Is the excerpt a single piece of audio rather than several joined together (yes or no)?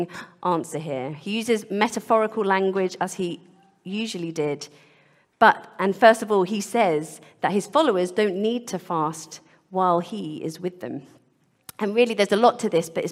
yes